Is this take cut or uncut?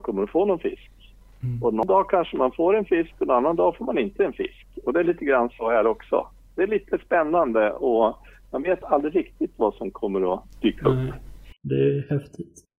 uncut